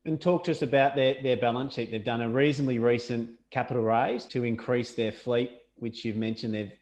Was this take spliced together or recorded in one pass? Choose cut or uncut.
cut